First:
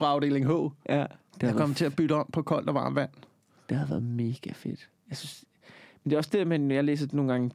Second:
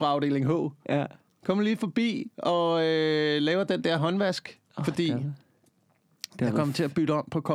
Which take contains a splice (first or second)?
first